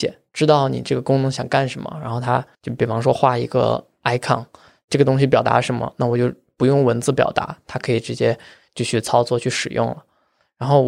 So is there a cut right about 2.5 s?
yes; 1 cut; at 2.5 s

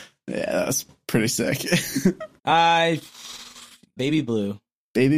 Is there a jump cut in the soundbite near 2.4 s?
yes; 2 cuts; at 2.4 s, 4.0 s

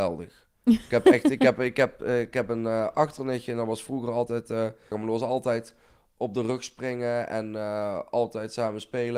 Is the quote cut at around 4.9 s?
yes; 1 cut; at 4.9 s

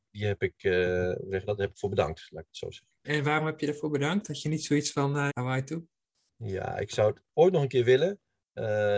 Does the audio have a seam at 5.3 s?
yes; 2 cuts; at 3.0 s, 5.3 s

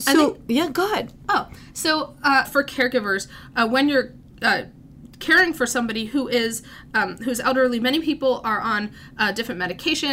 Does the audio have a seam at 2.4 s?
yes; 1 cut; at 2.4 s

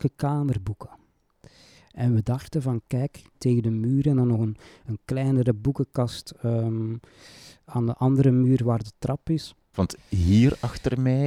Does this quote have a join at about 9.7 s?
yes; 2 cuts; at 3.3 s, 9.7 s

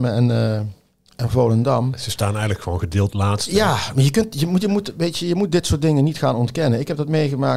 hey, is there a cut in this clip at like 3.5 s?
no; 0 cuts

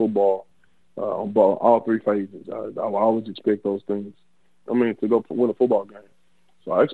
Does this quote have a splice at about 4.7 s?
yes; 2 cuts; at 2.4 s, 4.7 s

